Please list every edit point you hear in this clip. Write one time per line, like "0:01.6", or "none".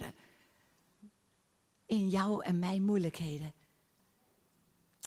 none